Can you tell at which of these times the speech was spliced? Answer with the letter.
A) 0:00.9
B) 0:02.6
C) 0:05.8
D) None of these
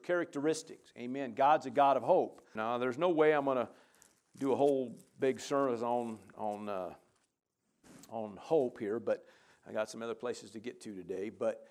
B